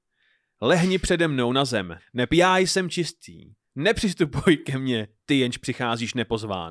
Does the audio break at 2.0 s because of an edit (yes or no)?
yes